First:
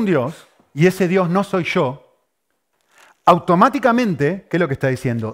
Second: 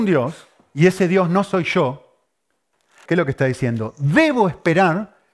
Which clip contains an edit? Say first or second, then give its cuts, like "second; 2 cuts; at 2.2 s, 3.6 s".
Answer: second; 1 cut; at 3.1 s